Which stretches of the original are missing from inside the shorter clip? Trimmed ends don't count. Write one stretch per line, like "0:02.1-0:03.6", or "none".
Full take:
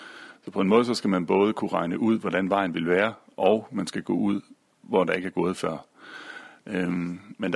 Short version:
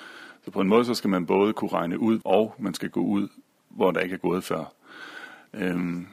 0:02.2-0:03.3